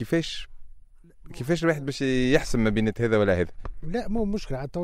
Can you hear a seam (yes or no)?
no